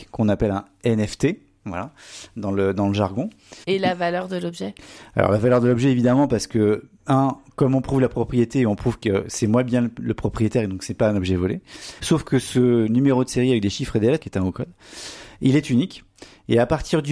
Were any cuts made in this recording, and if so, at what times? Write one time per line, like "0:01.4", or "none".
0:03.6
0:12.0
0:14.2